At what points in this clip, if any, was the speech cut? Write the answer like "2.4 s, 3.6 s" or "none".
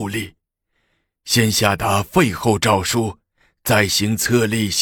none